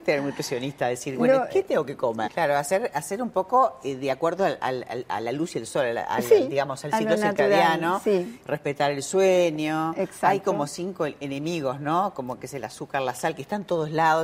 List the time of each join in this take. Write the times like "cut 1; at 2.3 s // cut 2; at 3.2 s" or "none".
cut 1; at 2.2 s